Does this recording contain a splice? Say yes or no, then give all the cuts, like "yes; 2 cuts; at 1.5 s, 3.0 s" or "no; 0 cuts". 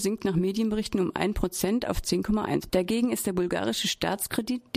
yes; 1 cut; at 2.7 s